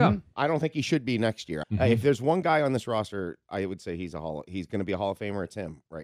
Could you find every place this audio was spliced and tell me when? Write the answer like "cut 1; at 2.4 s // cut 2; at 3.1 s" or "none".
cut 1; at 1.6 s